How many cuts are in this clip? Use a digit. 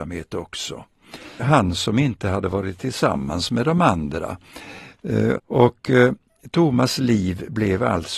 2